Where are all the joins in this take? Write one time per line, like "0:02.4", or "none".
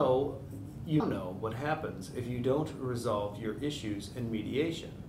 0:01.0